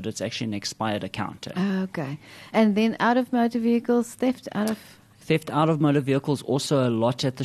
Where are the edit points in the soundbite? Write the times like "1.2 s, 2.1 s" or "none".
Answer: none